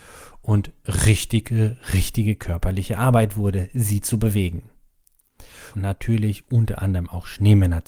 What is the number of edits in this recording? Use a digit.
1